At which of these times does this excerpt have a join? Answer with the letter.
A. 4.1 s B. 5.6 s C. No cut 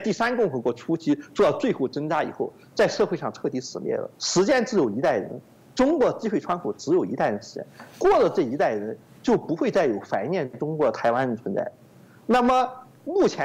A